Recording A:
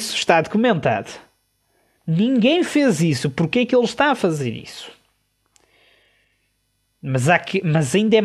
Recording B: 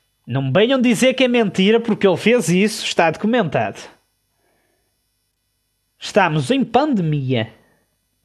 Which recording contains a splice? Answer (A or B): A